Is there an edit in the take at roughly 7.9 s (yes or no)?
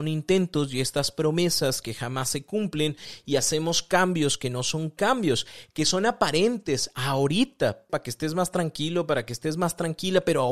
yes